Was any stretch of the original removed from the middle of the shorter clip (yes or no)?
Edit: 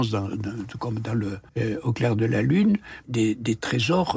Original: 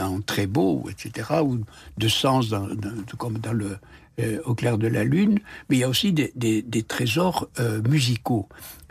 yes